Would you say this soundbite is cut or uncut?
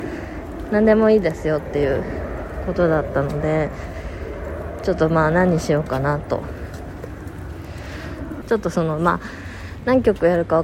cut